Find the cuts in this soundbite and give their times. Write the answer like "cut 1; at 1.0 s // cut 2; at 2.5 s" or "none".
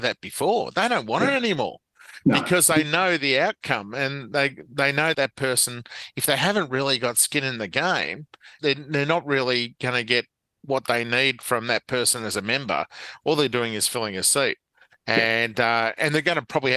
cut 1; at 5.1 s // cut 2; at 8.6 s